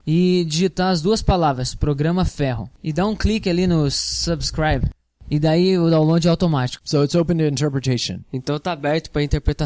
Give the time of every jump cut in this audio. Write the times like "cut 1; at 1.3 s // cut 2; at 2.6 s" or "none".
cut 1; at 6.8 s